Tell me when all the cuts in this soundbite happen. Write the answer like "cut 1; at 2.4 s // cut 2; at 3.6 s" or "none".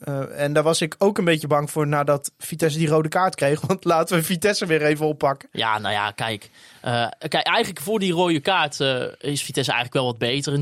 none